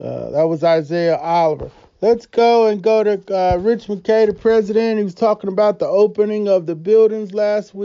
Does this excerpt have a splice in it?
no; 0 cuts

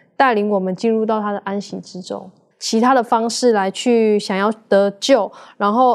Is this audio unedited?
no; 1 cut; at 2.5 s

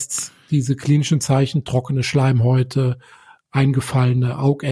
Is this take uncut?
yes; 0 cuts

